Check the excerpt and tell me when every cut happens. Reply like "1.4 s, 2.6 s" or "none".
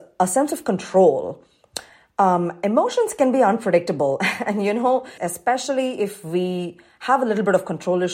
5.2 s